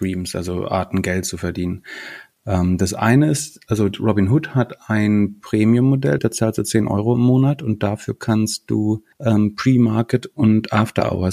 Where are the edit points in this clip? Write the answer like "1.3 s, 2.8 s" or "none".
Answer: 6.2 s, 9.1 s